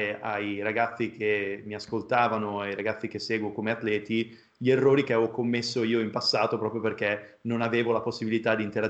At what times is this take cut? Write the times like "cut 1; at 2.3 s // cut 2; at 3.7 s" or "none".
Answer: none